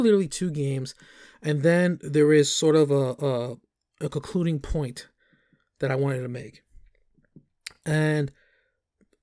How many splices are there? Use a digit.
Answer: 0